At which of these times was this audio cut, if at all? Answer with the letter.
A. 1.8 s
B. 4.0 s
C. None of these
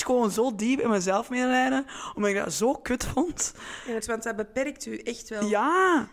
B